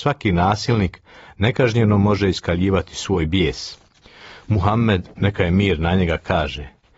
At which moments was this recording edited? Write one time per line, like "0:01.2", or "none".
0:05.1